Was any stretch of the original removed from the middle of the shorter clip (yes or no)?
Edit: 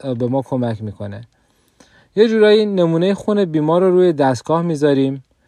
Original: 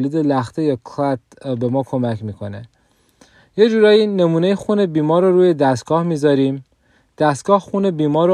no